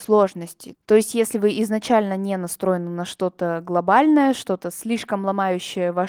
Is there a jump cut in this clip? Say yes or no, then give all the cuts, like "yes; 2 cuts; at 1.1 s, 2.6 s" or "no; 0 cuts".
no; 0 cuts